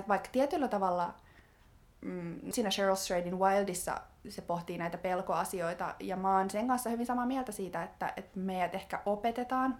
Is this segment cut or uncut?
cut